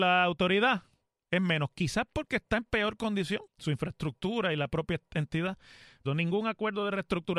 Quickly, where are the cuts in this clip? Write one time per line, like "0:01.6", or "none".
0:03.5
0:06.1